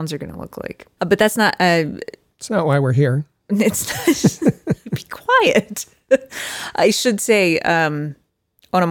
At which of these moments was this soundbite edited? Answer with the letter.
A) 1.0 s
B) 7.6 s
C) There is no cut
A